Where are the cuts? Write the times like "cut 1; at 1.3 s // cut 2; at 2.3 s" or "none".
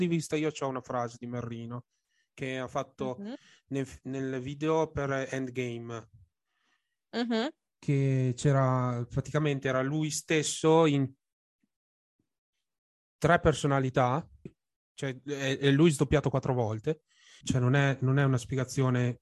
cut 1; at 14.5 s // cut 2; at 17.4 s

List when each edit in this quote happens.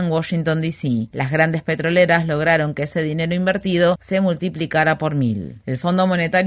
cut 1; at 1.1 s

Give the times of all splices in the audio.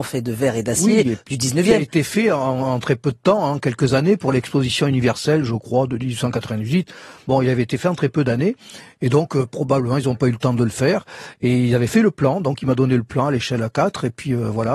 none

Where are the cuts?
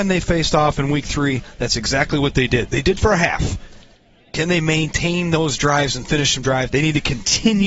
cut 1; at 2.7 s // cut 2; at 6.7 s

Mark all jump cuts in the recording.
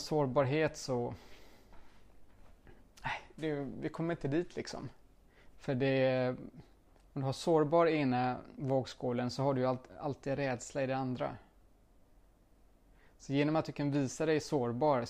cut 1; at 5.5 s

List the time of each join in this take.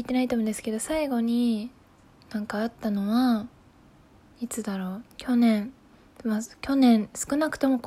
cut 1; at 5.1 s

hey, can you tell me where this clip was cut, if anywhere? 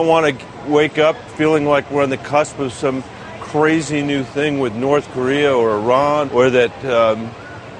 cut 1; at 1.3 s // cut 2; at 6.3 s

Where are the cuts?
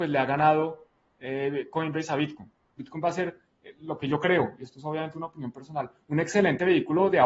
cut 1; at 2.8 s

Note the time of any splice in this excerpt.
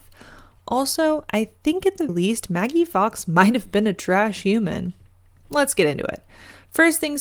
cut 1; at 2.1 s

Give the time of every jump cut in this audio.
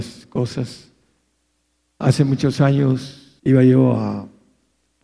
cut 1; at 2.0 s // cut 2; at 3.4 s

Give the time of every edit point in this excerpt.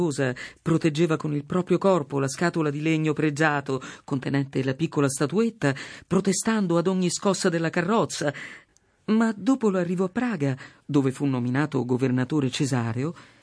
none

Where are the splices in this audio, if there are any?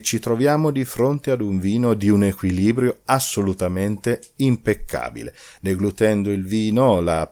cut 1; at 5.6 s

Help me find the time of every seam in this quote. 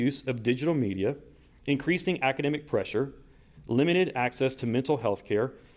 none

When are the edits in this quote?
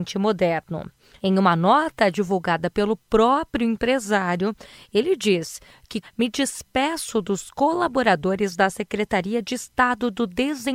cut 1; at 1.2 s // cut 2; at 6.0 s

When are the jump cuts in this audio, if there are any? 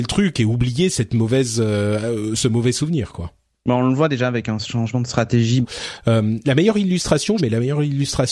cut 1; at 5.6 s // cut 2; at 7.4 s

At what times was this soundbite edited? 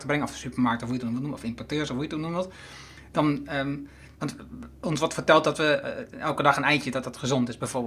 none

